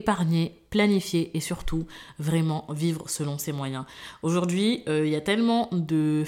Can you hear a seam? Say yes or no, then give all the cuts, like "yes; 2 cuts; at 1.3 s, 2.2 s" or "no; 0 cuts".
no; 0 cuts